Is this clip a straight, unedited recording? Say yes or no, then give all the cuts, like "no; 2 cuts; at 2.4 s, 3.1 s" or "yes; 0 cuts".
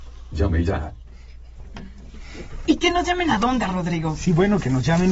no; 1 cut; at 2.6 s